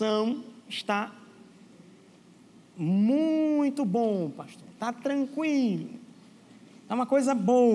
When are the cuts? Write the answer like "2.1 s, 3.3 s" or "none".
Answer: none